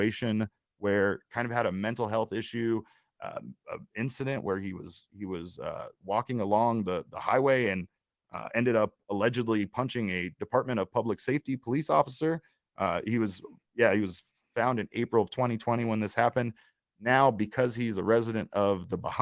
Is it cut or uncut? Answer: uncut